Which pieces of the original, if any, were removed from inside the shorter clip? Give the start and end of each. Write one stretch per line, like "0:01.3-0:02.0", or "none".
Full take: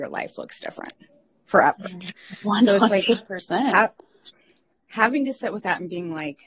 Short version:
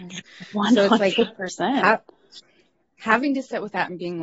none